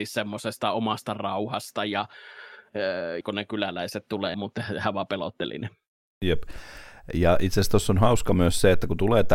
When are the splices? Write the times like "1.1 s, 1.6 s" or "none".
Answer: 3.2 s, 4.3 s